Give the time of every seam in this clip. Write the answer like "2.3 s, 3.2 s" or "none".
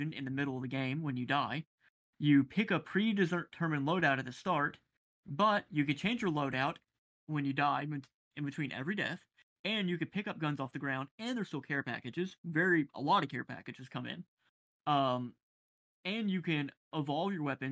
none